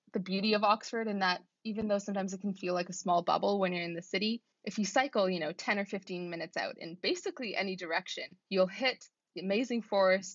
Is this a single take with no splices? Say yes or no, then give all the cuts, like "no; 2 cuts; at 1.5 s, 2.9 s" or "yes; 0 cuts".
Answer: no; 2 cuts; at 4.5 s, 8.4 s